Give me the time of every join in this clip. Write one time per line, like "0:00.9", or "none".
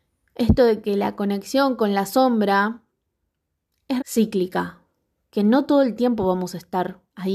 0:04.0